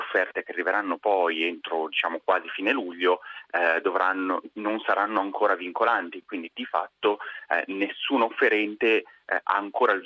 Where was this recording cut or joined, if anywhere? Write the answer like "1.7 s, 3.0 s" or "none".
none